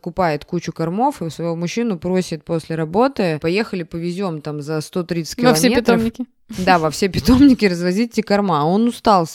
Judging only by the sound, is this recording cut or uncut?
uncut